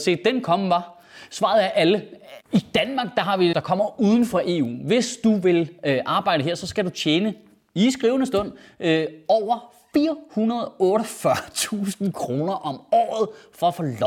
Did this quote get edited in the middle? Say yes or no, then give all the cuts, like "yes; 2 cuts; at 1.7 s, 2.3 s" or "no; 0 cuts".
yes; 2 cuts; at 2.4 s, 3.5 s